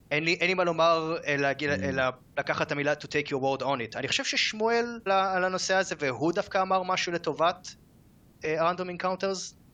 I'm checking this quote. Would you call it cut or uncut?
cut